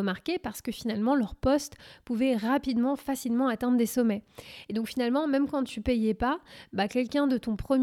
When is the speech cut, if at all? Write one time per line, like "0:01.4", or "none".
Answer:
0:04.6